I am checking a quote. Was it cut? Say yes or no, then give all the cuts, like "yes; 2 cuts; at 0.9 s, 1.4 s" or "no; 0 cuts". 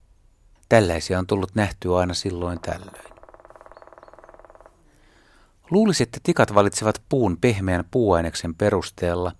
no; 0 cuts